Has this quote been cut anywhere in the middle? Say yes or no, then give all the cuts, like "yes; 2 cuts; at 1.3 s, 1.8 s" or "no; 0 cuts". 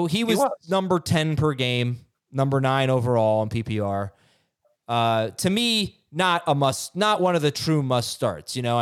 no; 0 cuts